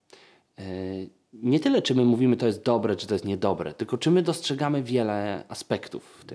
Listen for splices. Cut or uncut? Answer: uncut